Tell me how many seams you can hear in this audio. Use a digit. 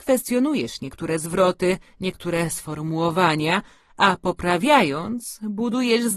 0